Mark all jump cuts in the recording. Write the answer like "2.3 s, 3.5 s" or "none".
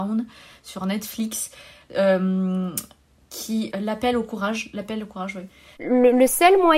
3.7 s, 5.8 s